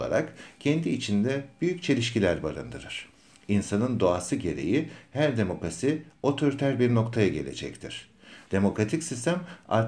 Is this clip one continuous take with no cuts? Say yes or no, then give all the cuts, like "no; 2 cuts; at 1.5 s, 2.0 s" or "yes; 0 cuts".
no; 1 cut; at 8.5 s